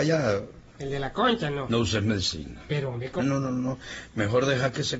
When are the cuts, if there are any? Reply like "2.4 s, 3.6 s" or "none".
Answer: 1.7 s, 3.2 s